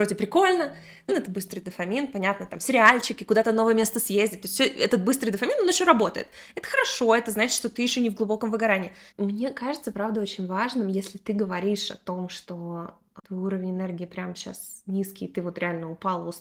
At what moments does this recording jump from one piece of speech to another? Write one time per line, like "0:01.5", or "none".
0:01.1
0:09.1